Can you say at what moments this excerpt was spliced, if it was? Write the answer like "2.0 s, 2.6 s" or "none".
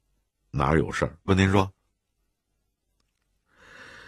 1.3 s